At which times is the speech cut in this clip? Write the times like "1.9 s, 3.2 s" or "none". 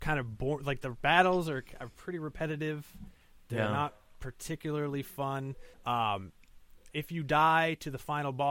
5.7 s, 6.9 s